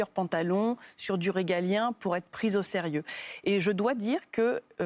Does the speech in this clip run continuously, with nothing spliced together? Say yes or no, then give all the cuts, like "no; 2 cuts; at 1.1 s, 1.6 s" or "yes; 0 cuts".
yes; 0 cuts